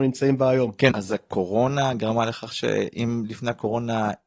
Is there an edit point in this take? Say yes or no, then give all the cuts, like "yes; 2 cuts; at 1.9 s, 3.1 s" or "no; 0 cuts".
yes; 1 cut; at 0.9 s